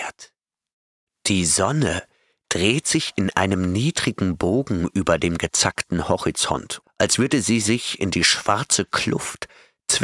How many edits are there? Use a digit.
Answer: 2